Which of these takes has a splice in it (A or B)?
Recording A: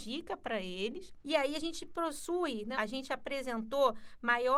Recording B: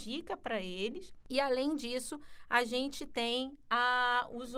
A